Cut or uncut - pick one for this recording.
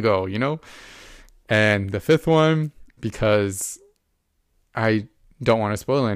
cut